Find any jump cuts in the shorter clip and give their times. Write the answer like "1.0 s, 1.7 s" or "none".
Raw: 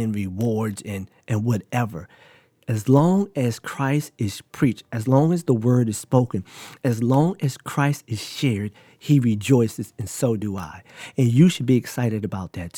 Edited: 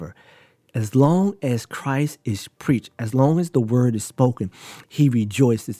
4.8 s